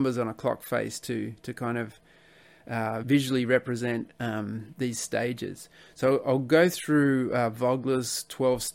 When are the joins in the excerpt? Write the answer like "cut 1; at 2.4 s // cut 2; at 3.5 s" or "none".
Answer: cut 1; at 3.0 s